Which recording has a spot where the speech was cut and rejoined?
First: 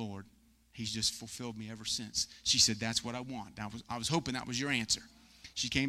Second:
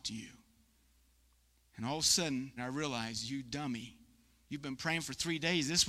second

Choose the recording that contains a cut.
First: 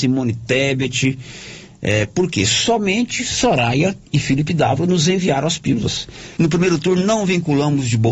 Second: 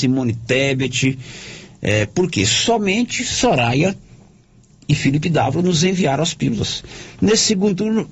first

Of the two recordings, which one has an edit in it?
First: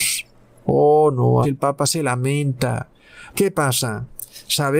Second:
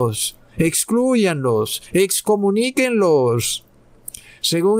first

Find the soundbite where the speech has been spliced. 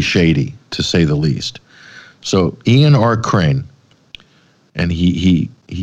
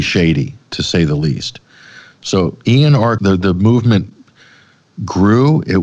second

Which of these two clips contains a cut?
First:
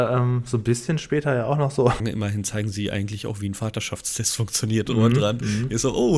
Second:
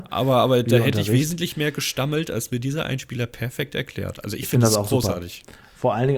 first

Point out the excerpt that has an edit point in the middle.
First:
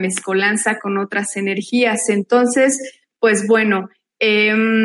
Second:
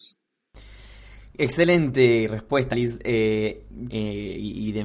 second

